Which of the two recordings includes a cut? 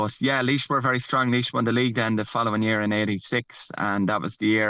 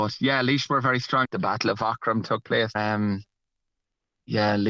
second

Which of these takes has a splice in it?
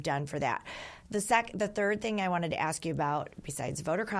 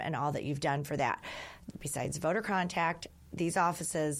second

